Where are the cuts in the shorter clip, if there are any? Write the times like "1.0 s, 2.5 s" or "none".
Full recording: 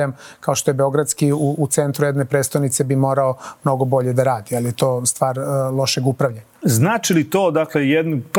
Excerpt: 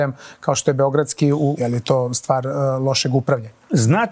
1.6 s